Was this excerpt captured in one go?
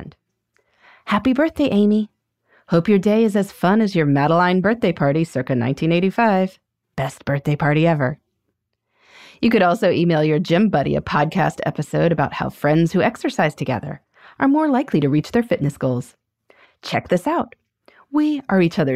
yes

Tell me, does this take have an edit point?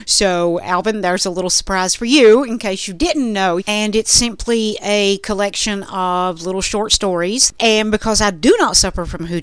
yes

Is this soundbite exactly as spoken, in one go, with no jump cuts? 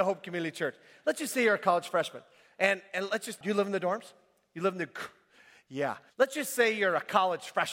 no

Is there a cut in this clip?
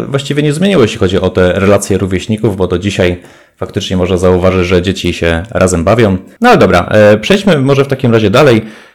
yes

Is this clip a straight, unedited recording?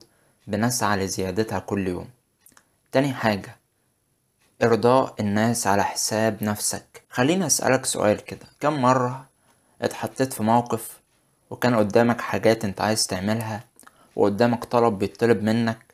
no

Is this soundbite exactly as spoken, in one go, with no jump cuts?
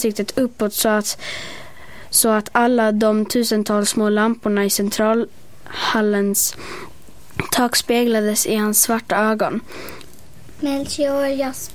yes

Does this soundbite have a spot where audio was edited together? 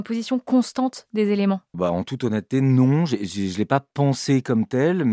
yes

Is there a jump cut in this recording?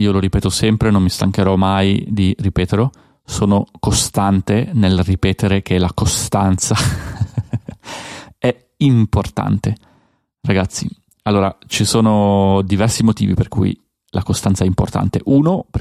no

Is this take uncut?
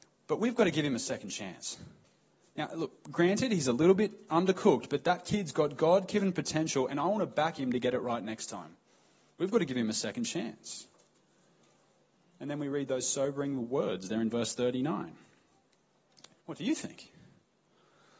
no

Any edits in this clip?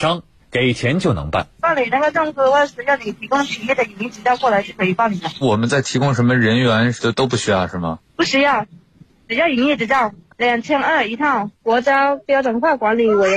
yes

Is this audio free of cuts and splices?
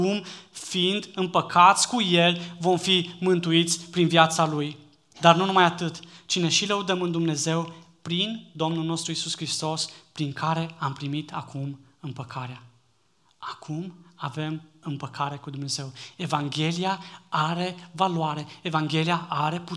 yes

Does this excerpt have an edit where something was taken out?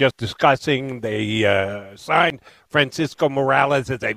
no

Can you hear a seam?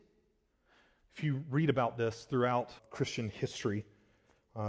yes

